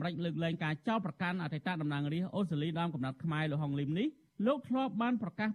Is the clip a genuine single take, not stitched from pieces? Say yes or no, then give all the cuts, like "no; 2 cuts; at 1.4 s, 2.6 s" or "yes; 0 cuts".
yes; 0 cuts